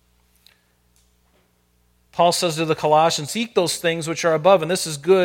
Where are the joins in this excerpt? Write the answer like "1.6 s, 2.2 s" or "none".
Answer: 3.3 s